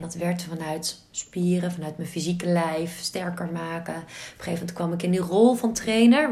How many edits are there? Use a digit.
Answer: 0